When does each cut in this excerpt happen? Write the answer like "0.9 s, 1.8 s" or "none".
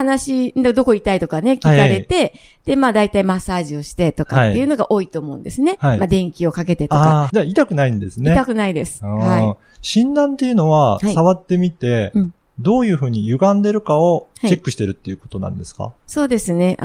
7.3 s

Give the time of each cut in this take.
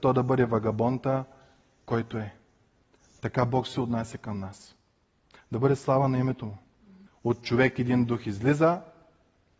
7.1 s

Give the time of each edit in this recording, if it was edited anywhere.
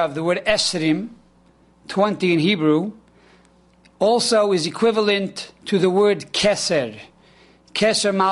none

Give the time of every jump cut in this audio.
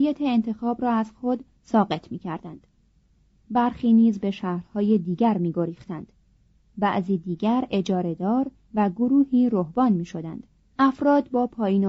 10.6 s

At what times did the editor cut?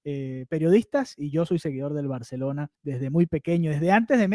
2.7 s

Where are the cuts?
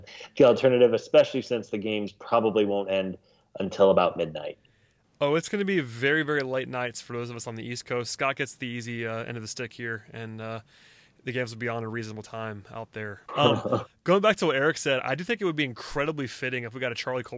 13.3 s

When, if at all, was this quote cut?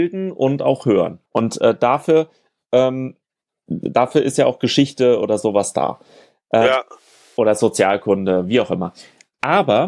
1.3 s

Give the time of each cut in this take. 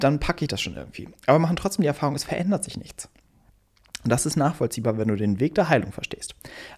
none

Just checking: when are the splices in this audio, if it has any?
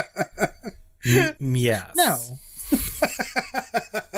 1.4 s

